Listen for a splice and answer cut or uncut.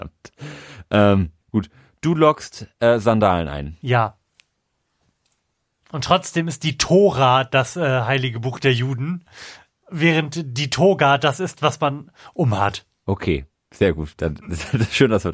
cut